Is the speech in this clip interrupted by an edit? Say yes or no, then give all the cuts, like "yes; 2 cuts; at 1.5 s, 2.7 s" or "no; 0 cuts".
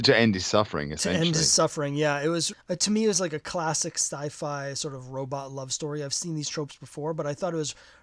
yes; 1 cut; at 2.5 s